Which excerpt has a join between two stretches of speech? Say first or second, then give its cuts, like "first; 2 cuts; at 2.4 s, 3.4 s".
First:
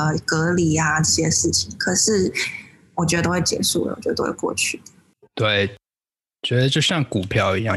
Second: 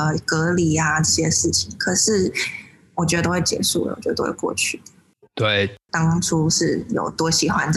second; 1 cut; at 5.9 s